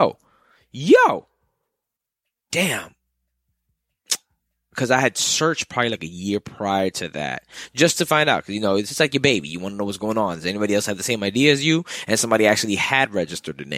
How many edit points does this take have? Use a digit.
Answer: 0